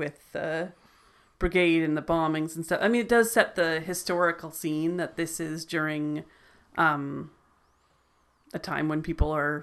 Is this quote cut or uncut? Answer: uncut